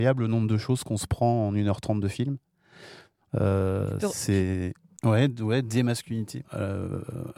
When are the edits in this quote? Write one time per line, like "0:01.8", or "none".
0:04.9
0:06.4